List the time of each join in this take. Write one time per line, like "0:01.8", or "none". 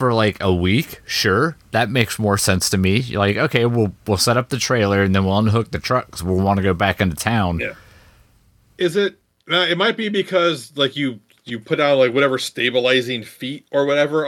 none